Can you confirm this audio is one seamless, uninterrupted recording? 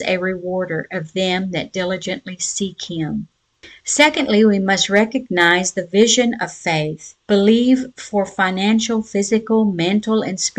no; 1 cut; at 7.2 s

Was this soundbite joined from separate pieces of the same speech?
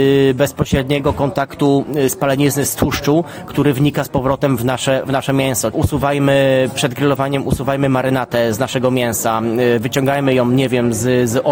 yes; 1 cut; at 5.7 s

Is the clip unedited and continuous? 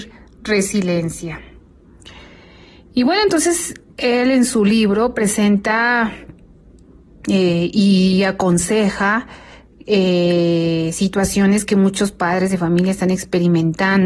yes; 0 cuts

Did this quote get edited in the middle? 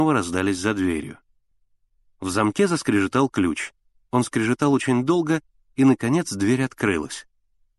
no; 0 cuts

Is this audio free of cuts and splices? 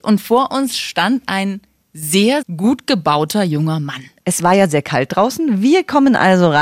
no; 2 cuts; at 2.4 s, 4.2 s

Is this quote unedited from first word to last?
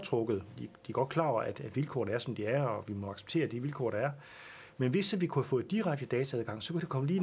yes; 0 cuts

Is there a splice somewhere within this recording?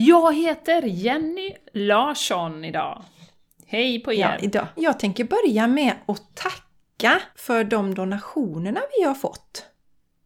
yes; 2 cuts; at 4.8 s, 7.3 s

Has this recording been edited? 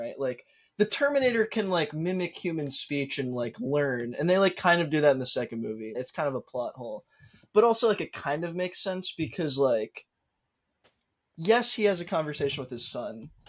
yes; 1 cut; at 5.9 s

